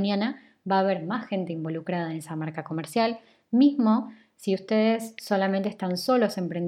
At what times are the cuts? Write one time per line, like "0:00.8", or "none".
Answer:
none